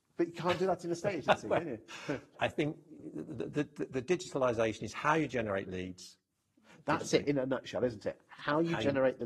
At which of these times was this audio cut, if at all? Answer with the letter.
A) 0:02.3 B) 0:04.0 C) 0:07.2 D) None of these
A